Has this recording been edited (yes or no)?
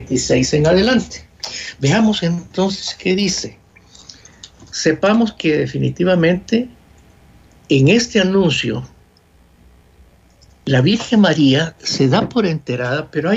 no